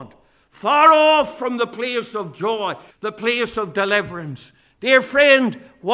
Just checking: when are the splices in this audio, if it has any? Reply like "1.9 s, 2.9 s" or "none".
2.9 s